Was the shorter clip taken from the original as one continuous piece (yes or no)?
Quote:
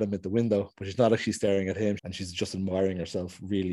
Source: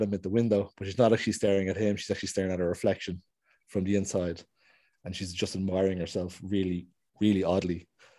no